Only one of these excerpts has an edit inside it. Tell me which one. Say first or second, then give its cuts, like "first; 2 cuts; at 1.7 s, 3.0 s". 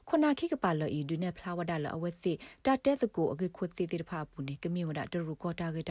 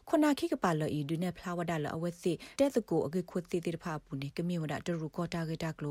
second; 1 cut; at 2.6 s